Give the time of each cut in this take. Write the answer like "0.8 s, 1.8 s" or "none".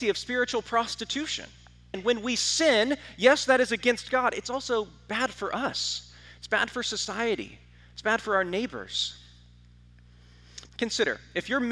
1.9 s, 10.7 s